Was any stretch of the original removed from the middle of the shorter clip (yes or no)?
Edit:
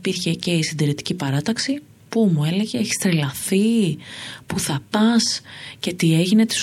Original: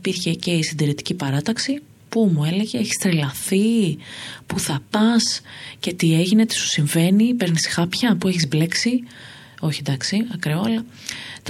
no